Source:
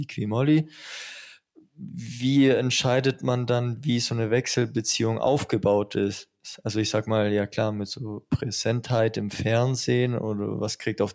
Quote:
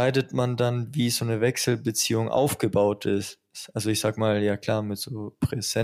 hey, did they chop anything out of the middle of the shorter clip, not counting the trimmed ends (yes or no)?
no